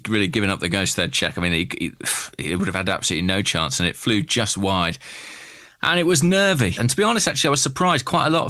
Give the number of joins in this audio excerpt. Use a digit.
1